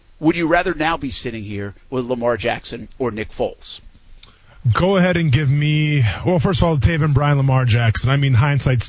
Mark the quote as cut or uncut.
uncut